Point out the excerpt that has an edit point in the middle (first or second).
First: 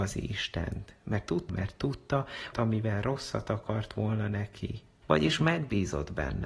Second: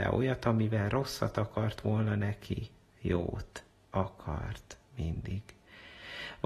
first